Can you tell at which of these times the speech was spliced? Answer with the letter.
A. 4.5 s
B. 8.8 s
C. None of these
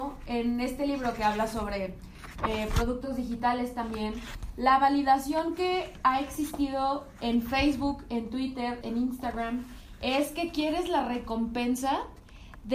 B